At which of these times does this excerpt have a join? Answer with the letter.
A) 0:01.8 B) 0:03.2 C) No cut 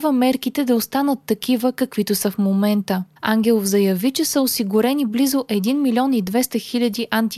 B